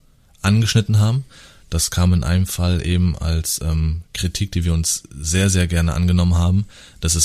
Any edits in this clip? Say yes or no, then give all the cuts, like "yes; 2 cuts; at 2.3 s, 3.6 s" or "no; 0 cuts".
no; 0 cuts